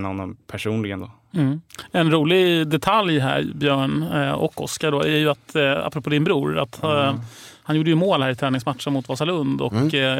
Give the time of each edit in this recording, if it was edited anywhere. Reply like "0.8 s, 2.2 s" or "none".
none